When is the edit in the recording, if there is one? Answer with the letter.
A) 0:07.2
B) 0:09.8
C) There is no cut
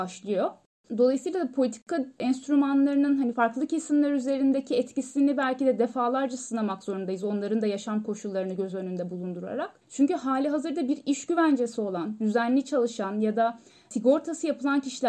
B